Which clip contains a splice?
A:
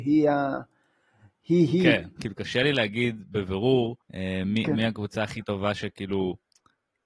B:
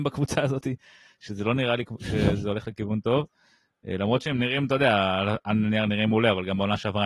A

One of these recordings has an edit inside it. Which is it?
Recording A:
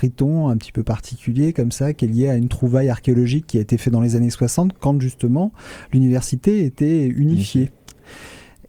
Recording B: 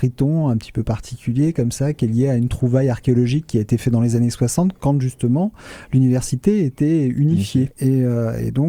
B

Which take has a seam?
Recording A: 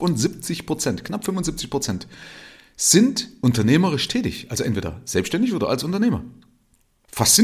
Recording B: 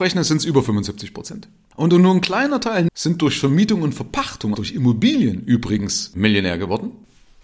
B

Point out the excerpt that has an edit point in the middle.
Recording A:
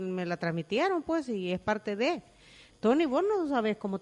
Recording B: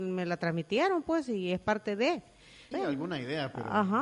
B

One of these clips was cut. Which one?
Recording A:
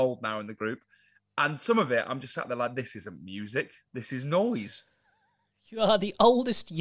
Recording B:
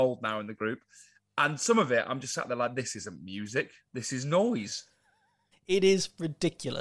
B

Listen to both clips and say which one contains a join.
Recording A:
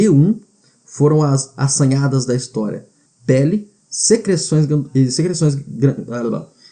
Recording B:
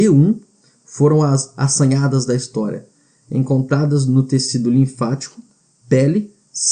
A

